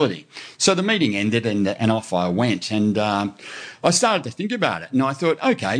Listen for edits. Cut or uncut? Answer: uncut